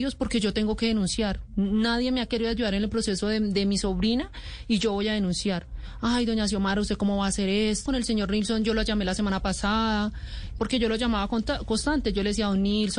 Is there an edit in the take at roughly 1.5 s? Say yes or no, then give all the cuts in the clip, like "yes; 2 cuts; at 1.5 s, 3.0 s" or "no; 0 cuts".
no; 2 cuts; at 7.9 s, 10.6 s